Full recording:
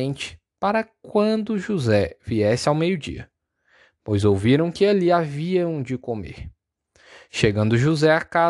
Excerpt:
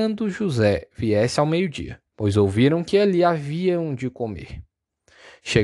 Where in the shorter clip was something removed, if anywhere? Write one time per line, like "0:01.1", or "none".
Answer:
0:02.1